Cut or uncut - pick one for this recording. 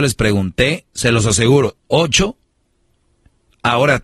cut